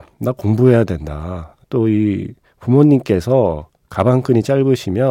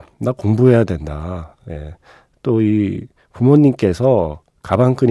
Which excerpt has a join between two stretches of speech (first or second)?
first